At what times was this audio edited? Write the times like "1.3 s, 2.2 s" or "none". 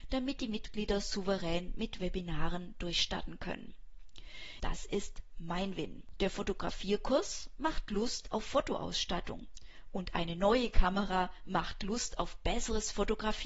4.6 s, 6.2 s